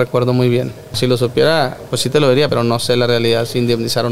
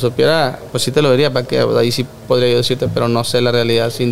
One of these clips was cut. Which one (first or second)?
first